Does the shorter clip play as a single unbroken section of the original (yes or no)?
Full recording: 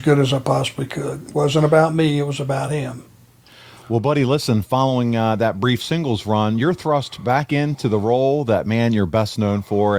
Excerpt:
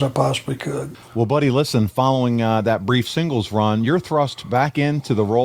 no